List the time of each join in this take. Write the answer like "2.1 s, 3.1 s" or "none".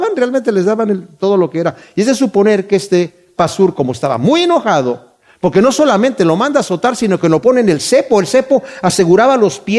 none